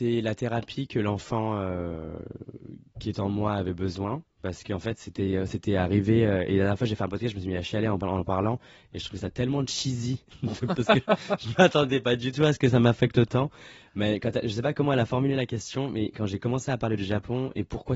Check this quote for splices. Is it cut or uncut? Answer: uncut